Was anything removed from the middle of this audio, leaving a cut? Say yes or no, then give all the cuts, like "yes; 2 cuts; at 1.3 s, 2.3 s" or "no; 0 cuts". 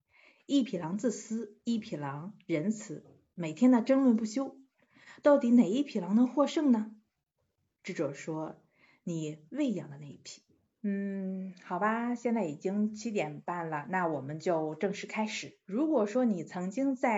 yes; 2 cuts; at 10.6 s, 15.6 s